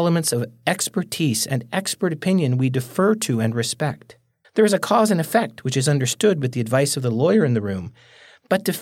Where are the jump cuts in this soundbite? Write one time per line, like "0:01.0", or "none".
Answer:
0:04.4